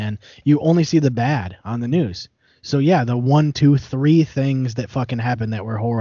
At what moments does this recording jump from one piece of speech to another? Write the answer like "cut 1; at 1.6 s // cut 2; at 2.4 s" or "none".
none